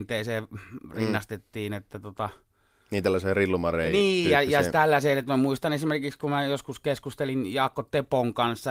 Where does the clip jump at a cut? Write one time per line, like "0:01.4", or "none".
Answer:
none